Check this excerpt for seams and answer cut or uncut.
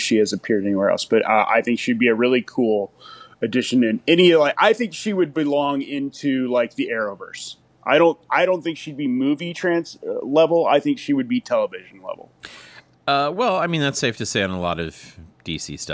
uncut